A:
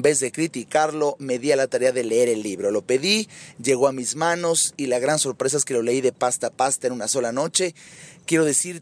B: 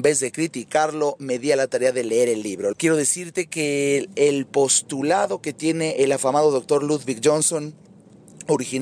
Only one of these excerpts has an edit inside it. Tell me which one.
B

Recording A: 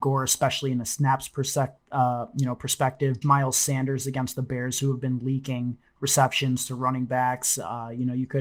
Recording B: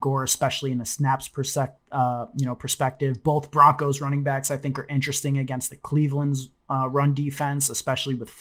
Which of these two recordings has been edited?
A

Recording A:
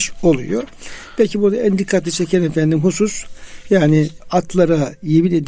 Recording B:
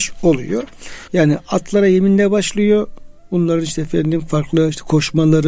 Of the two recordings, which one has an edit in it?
B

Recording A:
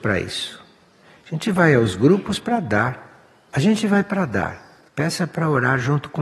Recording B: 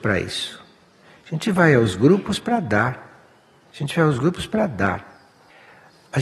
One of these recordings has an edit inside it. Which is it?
A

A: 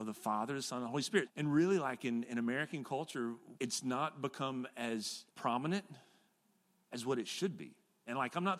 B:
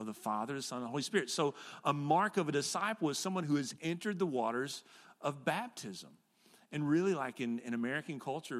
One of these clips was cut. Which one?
A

